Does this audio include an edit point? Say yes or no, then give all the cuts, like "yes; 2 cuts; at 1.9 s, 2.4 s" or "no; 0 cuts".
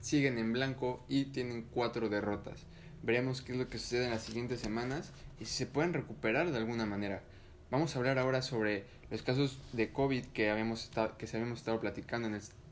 no; 0 cuts